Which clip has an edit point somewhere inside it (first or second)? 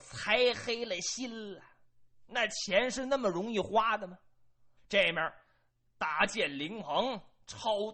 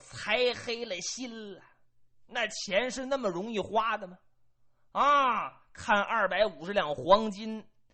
first